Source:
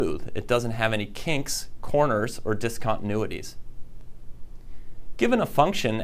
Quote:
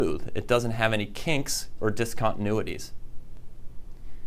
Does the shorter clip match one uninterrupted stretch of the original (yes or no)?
no